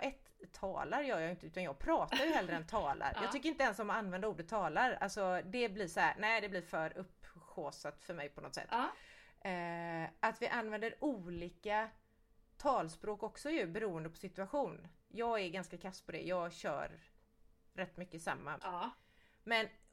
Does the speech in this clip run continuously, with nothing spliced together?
no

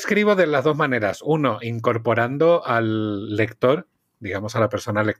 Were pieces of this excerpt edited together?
no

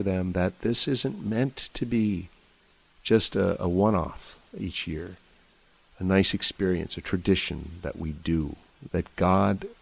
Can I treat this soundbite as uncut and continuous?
no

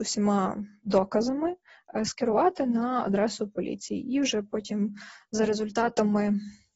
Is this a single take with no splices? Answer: yes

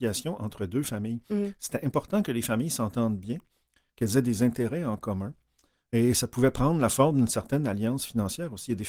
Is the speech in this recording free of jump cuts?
yes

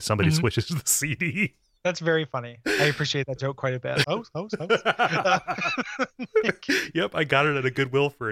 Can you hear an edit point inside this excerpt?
yes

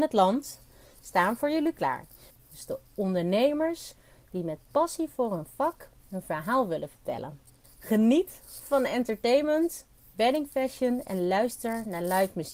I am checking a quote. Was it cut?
yes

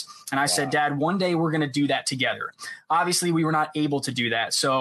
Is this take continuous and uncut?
yes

